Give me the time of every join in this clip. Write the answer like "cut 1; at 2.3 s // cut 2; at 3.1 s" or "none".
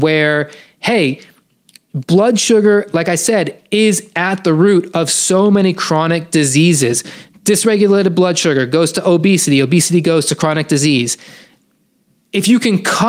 none